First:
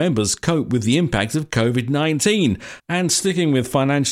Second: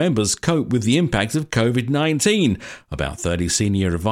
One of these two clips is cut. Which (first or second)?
first